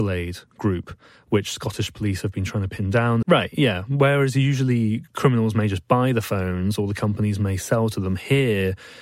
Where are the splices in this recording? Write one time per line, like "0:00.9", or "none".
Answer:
0:03.2